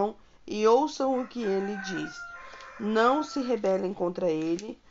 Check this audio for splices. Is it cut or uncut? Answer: uncut